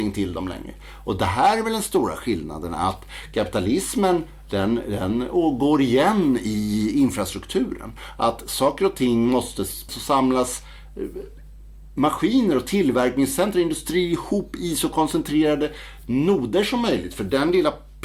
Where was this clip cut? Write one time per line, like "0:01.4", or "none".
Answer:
0:09.9